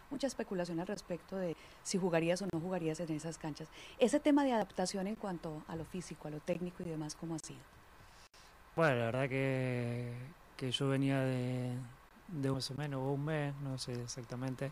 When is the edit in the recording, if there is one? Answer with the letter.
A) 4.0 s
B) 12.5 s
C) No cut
B